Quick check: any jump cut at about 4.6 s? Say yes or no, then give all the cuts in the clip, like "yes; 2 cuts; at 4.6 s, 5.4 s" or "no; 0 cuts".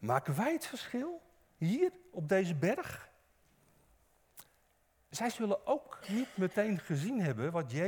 no; 0 cuts